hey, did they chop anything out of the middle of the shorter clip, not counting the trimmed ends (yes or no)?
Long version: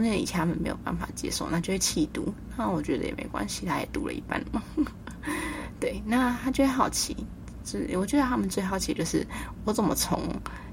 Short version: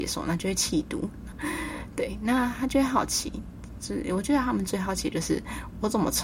yes